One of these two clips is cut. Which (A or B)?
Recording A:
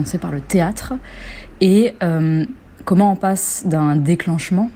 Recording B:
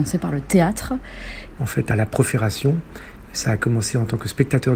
B